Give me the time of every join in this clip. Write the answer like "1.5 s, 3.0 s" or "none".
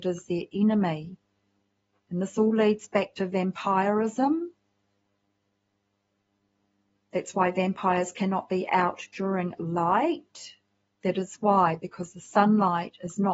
11.0 s